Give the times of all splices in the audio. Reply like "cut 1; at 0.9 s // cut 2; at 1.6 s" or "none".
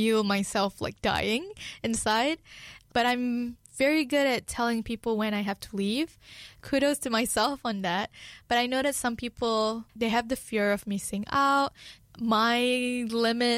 cut 1; at 9.9 s // cut 2; at 12.0 s